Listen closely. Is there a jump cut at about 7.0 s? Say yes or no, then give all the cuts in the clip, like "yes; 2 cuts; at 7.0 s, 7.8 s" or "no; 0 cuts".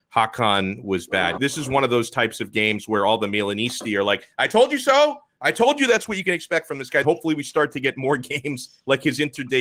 yes; 2 cuts; at 1.4 s, 7.0 s